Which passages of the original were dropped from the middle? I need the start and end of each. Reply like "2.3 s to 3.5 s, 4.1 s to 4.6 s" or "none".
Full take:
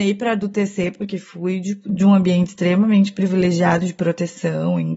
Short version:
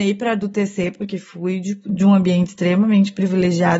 none